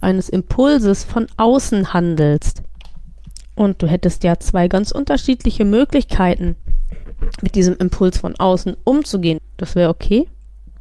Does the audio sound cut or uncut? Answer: cut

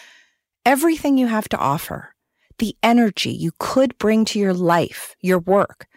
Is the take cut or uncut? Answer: uncut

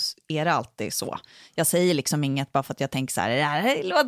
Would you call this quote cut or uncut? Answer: uncut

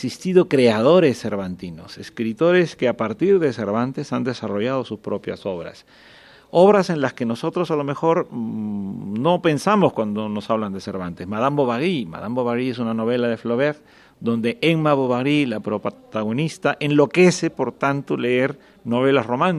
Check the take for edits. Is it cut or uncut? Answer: uncut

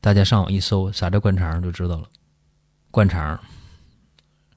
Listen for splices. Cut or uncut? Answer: cut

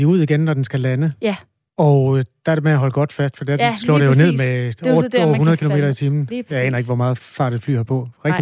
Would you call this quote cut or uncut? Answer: uncut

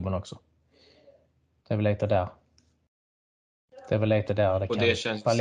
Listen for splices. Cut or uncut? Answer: uncut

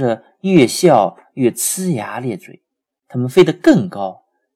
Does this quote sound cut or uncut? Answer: cut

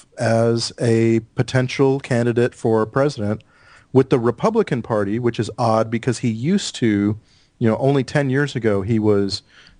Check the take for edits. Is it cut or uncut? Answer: uncut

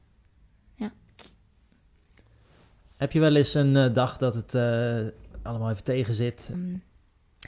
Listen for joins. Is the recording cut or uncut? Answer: cut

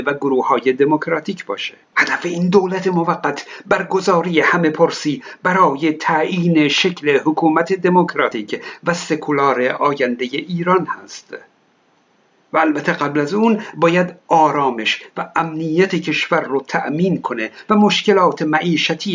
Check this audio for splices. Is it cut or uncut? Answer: cut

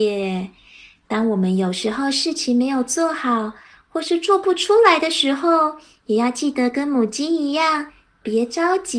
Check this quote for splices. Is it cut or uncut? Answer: uncut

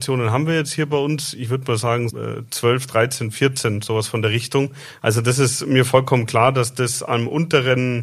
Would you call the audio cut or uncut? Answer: cut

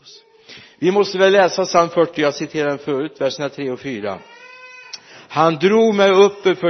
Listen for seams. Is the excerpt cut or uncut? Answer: uncut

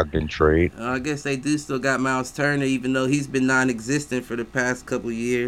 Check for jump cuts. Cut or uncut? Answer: uncut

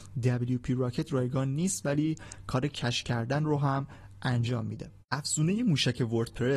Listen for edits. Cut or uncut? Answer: cut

